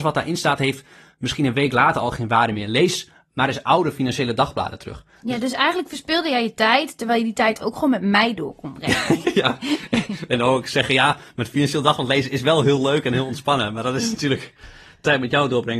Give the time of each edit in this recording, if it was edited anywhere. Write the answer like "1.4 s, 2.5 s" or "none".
9.2 s